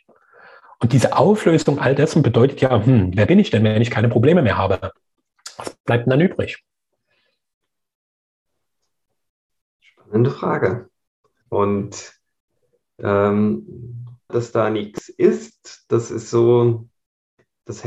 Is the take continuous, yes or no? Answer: no